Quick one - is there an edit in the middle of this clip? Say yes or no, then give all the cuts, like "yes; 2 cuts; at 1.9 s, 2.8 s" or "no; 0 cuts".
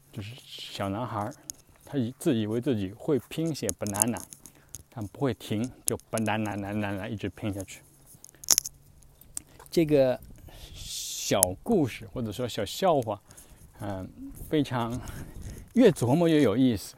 yes; 1 cut; at 6.5 s